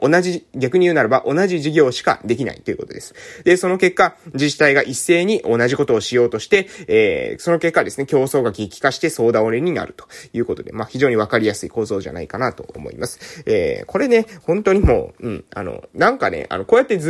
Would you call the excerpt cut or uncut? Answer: uncut